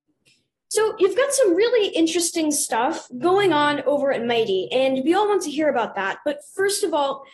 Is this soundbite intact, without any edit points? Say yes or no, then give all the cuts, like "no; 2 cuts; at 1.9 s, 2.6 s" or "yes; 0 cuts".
yes; 0 cuts